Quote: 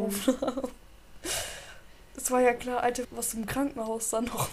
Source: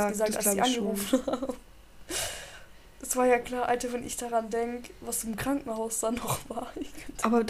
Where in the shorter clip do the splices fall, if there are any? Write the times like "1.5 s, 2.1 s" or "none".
3.0 s